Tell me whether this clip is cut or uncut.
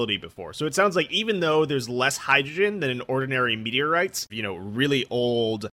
cut